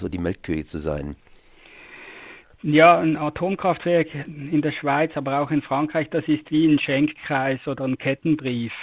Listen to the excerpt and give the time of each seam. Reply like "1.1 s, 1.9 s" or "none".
none